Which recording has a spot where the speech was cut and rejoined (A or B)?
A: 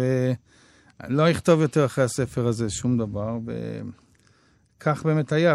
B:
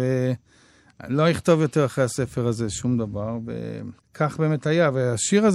B